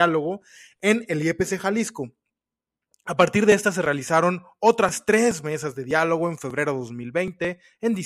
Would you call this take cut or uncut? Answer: uncut